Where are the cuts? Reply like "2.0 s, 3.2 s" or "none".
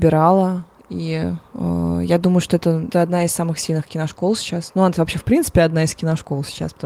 none